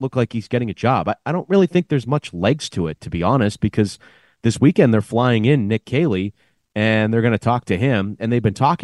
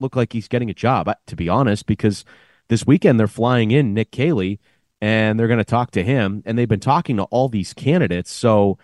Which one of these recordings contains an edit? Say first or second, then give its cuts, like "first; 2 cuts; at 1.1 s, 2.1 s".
second; 1 cut; at 1.2 s